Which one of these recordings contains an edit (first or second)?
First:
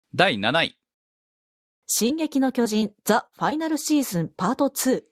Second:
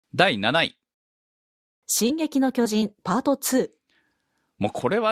second